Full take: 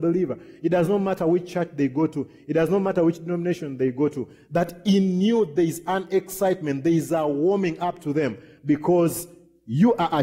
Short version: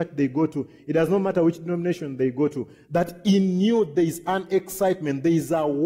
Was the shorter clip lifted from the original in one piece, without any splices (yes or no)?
yes